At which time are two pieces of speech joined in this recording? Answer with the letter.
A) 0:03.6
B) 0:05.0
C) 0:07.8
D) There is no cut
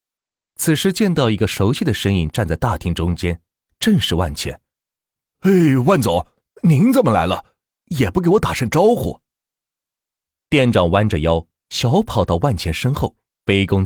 A